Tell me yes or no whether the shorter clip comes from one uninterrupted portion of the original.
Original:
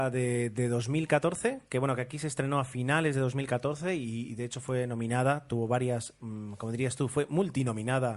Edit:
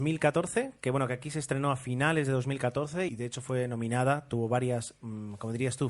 no